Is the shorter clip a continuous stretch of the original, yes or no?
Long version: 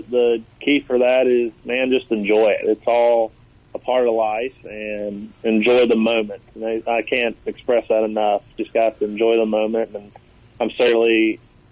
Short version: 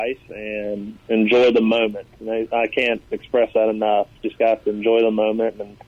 yes